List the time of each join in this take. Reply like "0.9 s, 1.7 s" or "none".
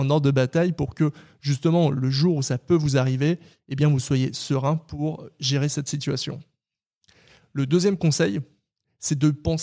none